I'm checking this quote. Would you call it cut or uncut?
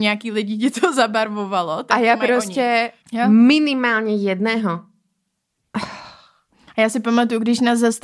cut